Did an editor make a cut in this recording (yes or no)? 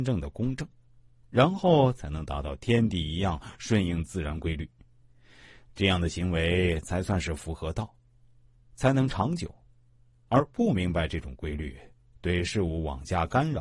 no